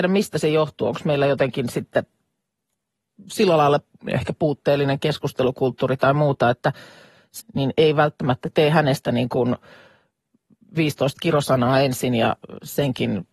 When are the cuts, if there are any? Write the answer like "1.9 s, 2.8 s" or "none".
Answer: 7.4 s